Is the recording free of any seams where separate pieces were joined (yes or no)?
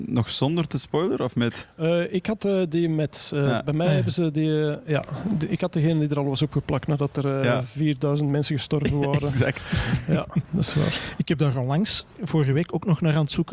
yes